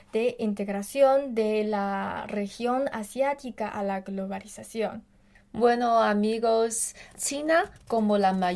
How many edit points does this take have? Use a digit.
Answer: 2